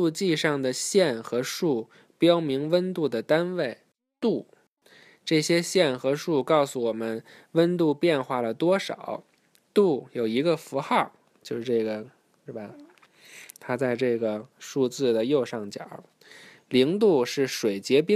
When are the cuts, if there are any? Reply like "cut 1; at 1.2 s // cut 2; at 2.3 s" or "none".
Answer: cut 1; at 12.5 s